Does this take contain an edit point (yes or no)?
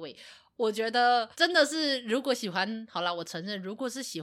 yes